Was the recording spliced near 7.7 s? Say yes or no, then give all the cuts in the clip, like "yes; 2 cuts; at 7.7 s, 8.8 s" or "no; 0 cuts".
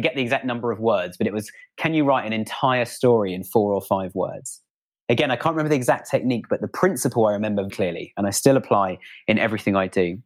yes; 1 cut; at 7.7 s